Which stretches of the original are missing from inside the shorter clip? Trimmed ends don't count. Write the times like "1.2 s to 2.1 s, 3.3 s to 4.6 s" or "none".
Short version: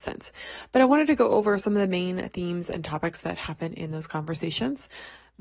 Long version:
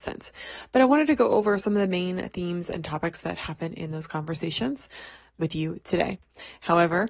none